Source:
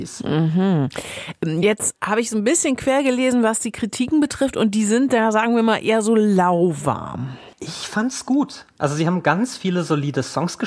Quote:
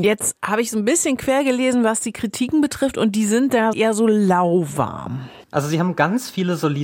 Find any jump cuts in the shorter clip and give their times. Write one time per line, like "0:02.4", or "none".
0:03.7
0:05.4

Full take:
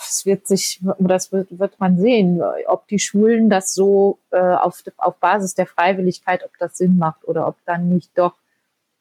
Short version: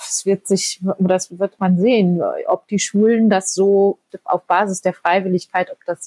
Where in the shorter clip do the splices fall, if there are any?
0:01.3
0:04.1

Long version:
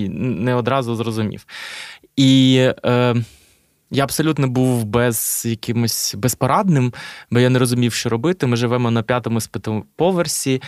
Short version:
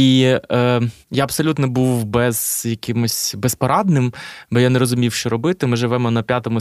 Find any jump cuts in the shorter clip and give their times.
0:01.0

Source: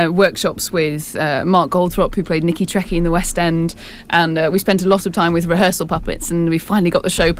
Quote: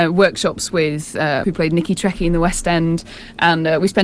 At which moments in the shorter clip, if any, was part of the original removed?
0:01.4

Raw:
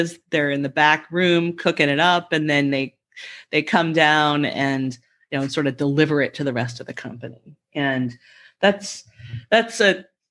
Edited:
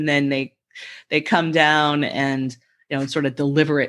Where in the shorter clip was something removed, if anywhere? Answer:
none

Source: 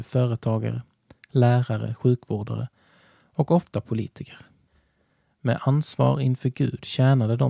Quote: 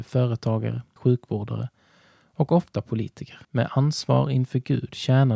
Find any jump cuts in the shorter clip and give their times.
0:01.0
0:03.4

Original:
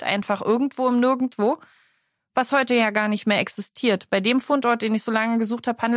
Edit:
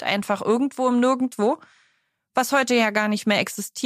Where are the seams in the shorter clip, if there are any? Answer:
none

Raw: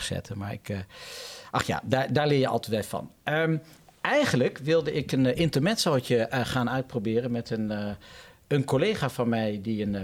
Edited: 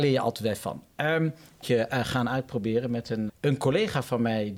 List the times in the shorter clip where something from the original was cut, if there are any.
0:01.6
0:03.3

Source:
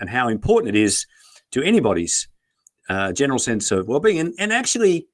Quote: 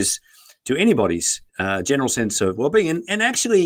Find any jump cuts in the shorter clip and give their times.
0:01.5

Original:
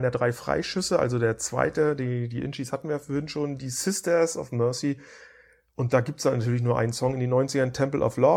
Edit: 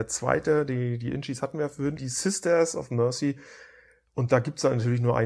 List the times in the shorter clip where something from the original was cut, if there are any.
0:02.0

